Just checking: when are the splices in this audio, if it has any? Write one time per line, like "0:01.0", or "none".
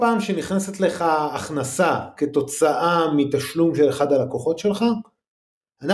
none